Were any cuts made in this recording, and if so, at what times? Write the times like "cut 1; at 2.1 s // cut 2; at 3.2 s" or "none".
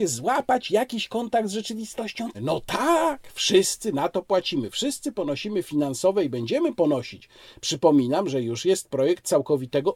cut 1; at 2.3 s